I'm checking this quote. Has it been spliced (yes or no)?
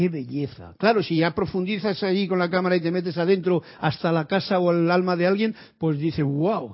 no